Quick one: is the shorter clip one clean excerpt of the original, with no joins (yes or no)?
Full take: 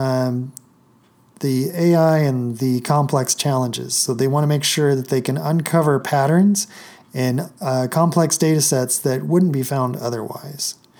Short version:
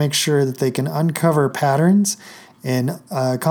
yes